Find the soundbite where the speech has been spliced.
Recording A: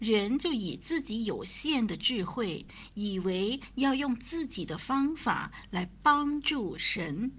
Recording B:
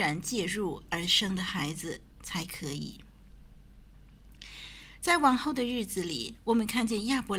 B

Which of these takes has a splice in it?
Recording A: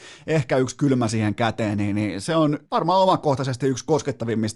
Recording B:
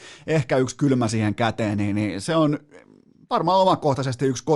A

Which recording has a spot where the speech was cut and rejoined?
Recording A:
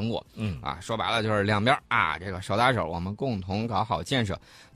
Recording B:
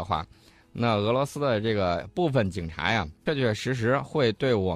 B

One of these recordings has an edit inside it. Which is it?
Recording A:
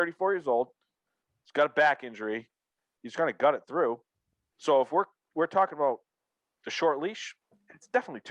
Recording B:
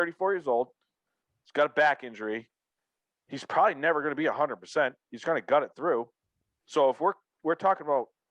A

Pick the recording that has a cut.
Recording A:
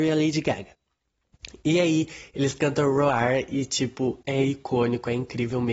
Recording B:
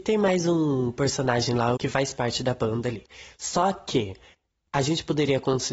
B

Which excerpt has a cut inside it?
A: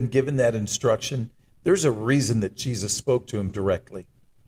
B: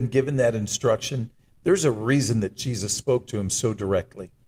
A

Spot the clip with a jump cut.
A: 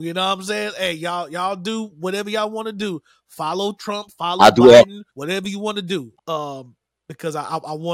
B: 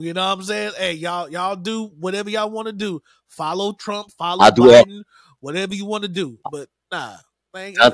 A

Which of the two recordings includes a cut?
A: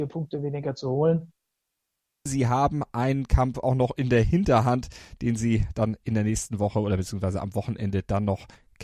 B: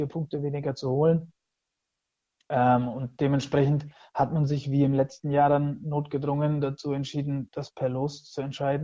A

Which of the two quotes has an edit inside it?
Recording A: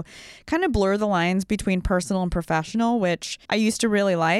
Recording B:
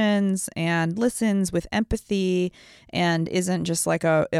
A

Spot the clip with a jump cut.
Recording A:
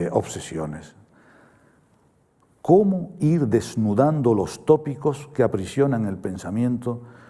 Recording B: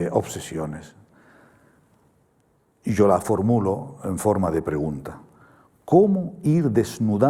A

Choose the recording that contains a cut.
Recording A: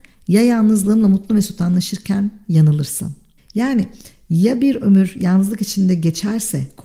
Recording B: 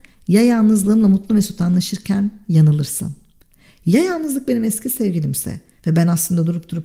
A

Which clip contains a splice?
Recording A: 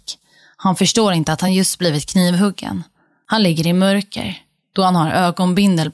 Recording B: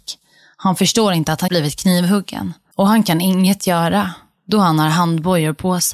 B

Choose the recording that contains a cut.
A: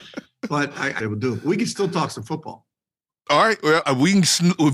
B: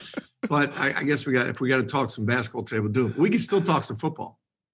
A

